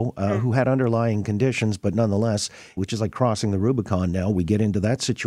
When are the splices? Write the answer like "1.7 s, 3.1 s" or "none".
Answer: 2.8 s